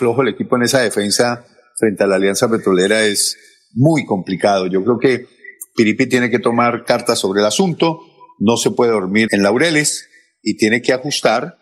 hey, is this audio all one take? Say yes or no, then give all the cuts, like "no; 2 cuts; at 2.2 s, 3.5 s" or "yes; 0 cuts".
no; 1 cut; at 9.3 s